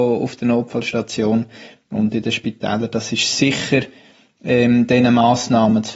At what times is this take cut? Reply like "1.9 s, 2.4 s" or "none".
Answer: none